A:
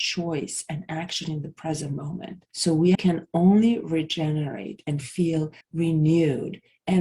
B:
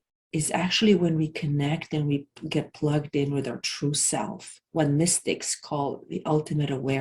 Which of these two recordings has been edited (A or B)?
A